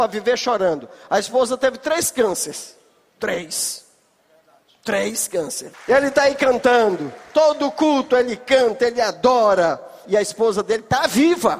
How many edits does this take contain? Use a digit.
2